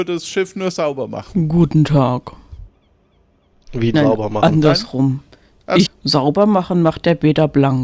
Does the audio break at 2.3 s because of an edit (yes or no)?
no